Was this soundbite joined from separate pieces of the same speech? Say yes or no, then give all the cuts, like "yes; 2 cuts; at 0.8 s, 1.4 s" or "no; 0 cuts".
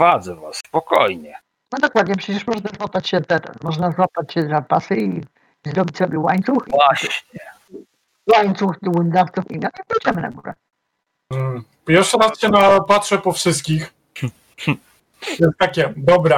no; 0 cuts